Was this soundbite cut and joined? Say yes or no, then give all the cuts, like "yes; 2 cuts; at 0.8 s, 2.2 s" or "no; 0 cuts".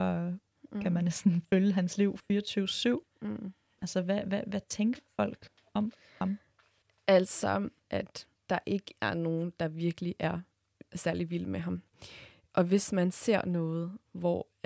yes; 2 cuts; at 3.8 s, 7.8 s